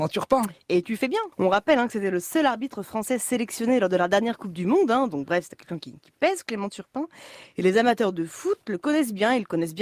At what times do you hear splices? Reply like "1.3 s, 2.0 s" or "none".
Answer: none